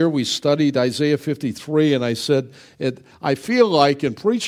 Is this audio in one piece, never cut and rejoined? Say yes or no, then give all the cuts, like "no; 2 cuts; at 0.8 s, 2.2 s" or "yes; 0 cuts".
yes; 0 cuts